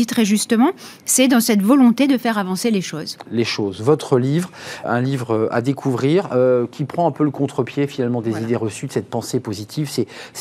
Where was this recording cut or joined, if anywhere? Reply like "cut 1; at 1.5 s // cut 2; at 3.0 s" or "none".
cut 1; at 3.2 s // cut 2; at 4.8 s